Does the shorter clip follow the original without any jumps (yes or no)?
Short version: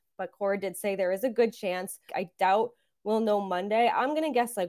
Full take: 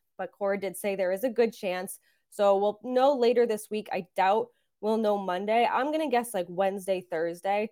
no